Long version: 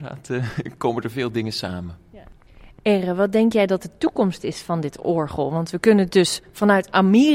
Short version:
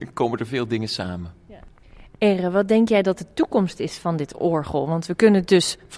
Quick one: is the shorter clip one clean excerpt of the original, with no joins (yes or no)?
yes